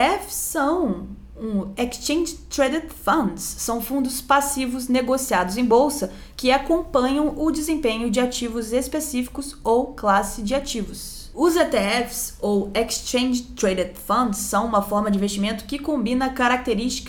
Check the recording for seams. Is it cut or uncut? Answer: cut